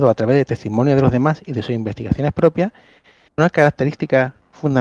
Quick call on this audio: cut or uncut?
uncut